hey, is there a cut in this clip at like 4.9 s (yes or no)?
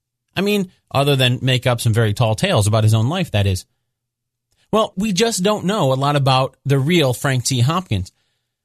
yes